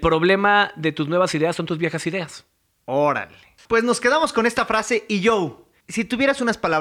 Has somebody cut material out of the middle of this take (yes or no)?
no